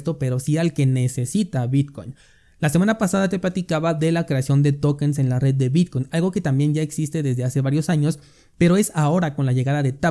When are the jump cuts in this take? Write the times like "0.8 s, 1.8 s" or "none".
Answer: none